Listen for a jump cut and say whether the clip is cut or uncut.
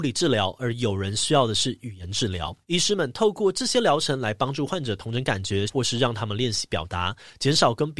cut